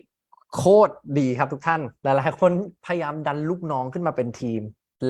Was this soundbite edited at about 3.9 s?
no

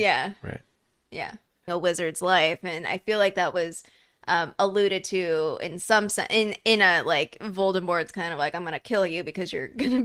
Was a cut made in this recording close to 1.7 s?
yes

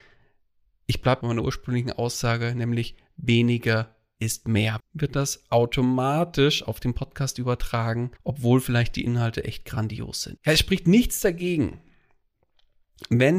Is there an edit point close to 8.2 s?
yes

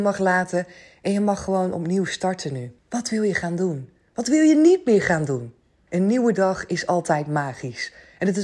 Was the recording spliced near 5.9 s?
yes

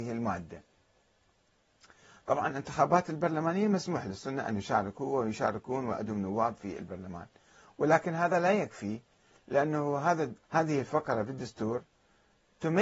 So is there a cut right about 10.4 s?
yes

